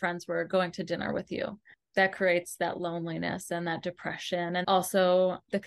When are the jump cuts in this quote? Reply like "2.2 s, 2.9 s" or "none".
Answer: 4.6 s